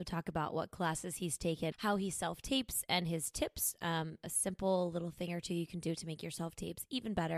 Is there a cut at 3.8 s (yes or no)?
no